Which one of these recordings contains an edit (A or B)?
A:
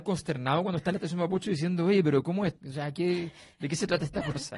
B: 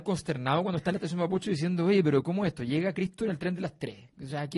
A